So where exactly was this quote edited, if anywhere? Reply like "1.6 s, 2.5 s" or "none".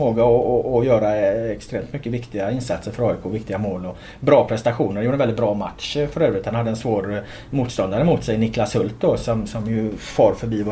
none